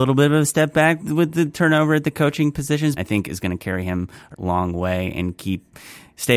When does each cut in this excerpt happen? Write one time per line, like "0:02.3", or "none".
0:01.0
0:03.0
0:04.3